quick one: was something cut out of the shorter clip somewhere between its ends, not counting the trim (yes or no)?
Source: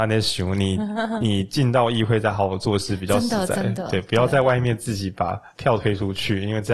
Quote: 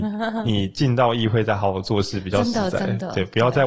no